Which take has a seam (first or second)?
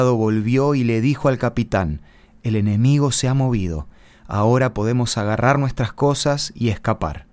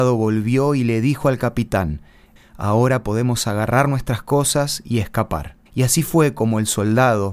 second